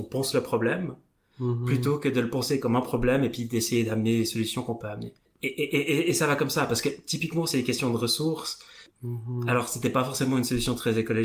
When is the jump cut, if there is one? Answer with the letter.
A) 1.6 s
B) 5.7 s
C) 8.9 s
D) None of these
C